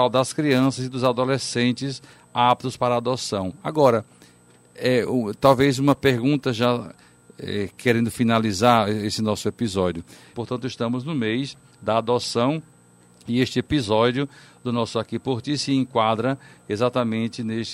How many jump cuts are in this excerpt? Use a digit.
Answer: 1